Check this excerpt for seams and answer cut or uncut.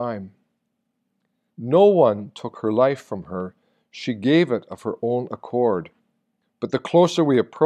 cut